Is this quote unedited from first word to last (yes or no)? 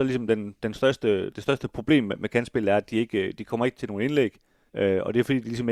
no